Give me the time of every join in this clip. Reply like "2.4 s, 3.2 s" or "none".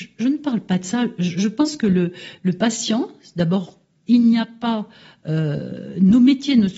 none